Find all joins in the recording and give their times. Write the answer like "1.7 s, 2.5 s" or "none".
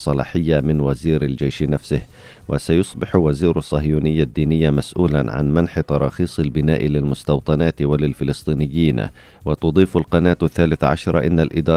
none